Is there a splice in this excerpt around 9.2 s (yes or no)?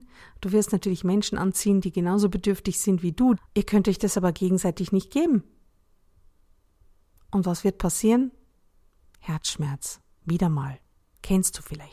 no